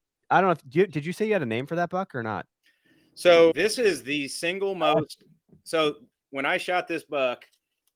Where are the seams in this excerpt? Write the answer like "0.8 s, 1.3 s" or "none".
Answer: 3.5 s